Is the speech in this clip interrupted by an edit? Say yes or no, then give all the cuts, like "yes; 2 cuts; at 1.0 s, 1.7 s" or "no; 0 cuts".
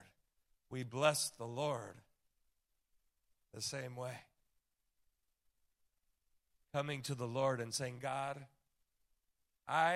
no; 0 cuts